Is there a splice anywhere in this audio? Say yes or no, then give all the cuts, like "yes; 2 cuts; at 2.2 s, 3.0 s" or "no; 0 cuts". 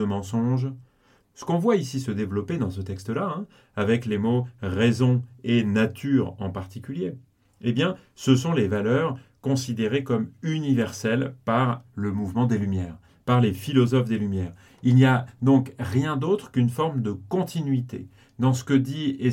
yes; 1 cut; at 1.2 s